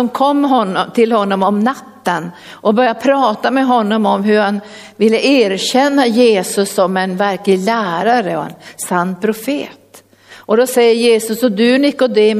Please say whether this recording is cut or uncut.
uncut